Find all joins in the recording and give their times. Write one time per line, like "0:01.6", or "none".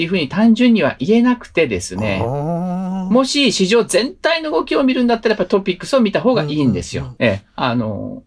0:07.2